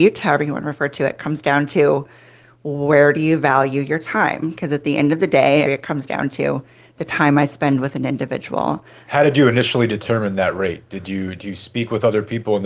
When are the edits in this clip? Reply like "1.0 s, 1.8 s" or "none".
5.7 s, 9.1 s